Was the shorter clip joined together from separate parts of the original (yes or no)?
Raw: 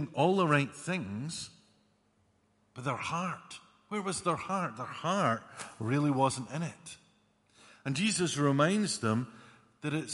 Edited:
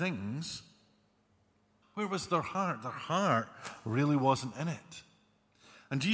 yes